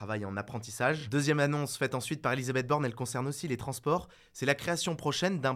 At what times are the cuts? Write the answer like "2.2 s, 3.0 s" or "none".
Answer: none